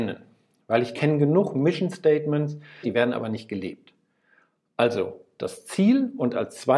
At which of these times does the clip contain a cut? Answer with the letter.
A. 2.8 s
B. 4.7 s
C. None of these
A